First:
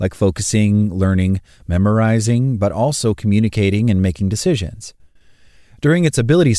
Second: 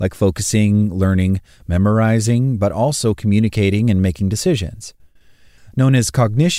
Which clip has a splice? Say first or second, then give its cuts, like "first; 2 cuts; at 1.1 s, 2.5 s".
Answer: second; 1 cut; at 5.6 s